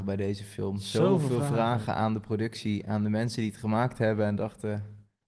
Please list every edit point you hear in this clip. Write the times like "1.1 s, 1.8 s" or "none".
none